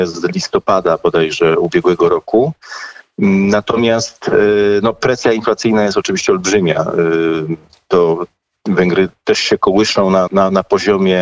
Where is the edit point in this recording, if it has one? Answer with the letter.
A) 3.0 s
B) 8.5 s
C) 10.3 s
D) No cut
C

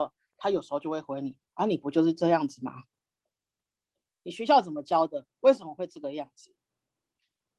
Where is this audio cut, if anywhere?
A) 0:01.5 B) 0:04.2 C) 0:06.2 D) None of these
B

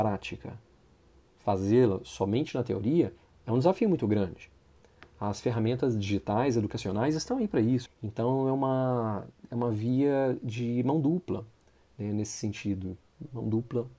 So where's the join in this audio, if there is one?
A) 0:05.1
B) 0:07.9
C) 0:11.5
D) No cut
B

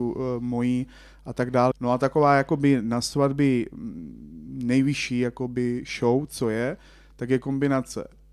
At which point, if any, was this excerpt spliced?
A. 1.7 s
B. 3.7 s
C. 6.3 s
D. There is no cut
A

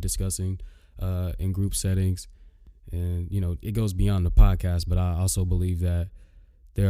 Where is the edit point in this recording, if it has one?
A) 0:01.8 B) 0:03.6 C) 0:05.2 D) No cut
B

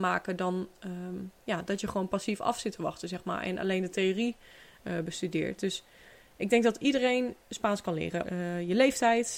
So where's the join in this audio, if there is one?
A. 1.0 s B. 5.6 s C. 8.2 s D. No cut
C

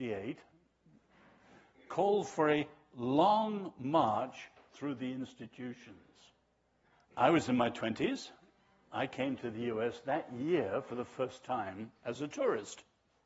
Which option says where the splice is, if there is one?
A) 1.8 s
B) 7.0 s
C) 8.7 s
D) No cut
B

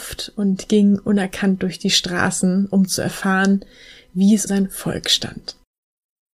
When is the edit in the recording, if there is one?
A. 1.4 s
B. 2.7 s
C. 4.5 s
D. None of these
C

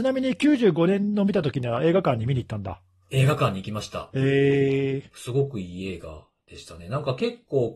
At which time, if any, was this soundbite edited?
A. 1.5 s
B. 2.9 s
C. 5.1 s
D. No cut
C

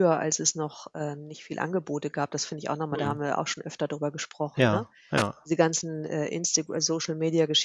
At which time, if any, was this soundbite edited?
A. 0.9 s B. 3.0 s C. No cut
C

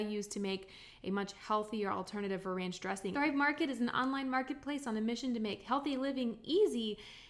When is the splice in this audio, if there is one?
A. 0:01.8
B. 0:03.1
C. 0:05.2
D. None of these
B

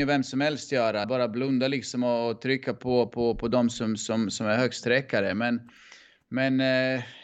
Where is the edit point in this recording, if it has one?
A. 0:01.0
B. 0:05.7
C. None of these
A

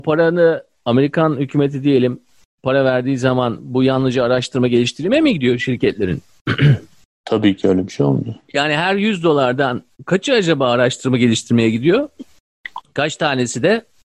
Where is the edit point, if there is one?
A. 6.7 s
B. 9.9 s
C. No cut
B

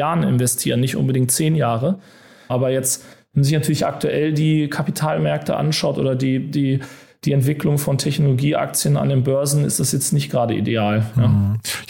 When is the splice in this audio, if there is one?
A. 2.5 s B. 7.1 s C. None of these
A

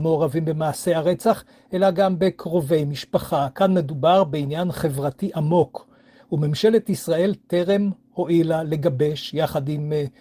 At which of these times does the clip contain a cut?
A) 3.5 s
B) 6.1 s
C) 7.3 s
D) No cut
D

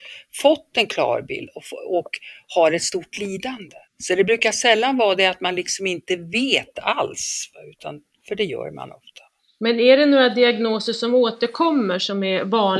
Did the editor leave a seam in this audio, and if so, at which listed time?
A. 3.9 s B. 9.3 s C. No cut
A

